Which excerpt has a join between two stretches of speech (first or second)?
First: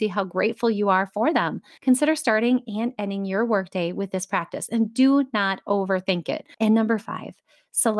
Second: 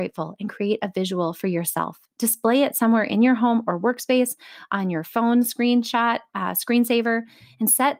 first